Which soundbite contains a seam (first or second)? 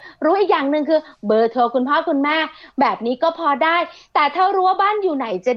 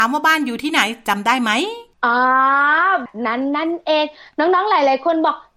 second